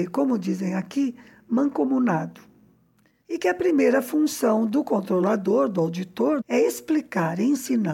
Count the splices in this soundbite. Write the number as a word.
two